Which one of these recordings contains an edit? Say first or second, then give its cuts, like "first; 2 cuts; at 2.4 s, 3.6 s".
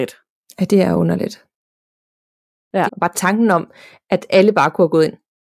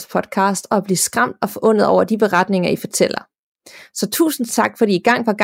first; 1 cut; at 2.9 s